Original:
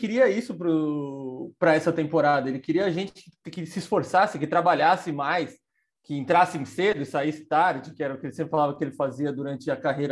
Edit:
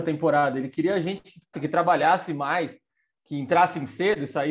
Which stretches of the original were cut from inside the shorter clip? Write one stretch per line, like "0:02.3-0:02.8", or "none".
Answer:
0:03.4-0:04.3